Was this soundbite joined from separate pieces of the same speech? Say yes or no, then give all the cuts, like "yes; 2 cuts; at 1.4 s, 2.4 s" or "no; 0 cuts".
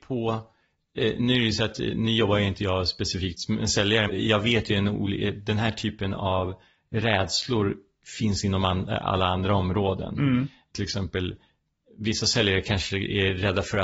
yes; 1 cut; at 4.1 s